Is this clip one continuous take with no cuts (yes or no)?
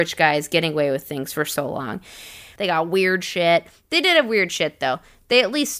no